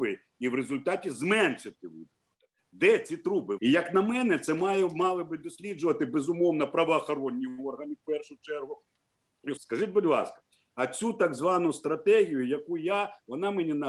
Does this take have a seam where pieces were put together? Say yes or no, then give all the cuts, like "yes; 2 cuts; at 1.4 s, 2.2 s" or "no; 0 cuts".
yes; 2 cuts; at 3.6 s, 9.6 s